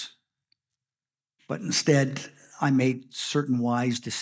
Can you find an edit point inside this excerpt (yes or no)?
yes